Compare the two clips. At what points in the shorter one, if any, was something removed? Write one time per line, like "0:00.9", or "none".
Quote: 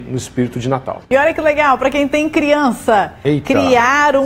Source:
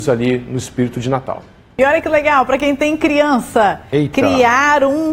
0:01.0